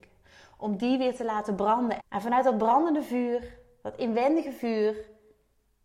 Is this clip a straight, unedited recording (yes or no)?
no